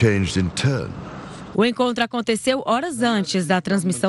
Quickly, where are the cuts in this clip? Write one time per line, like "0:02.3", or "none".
0:01.5